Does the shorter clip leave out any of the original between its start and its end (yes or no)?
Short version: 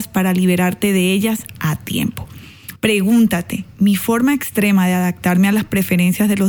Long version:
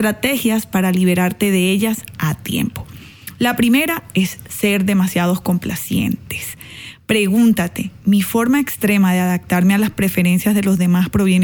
yes